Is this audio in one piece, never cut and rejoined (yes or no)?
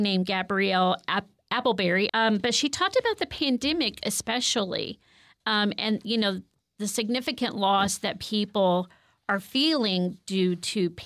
no